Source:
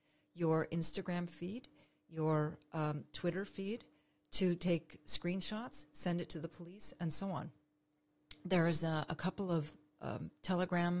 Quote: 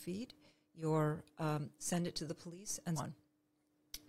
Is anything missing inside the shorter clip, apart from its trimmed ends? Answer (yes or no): yes